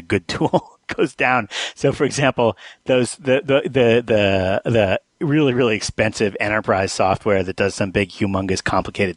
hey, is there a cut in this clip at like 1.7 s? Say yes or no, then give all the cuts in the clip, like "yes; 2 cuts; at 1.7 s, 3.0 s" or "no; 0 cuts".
no; 0 cuts